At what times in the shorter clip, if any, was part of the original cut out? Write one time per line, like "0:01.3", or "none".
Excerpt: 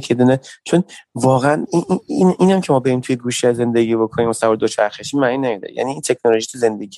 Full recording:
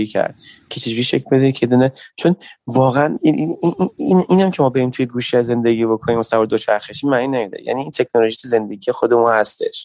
0:01.7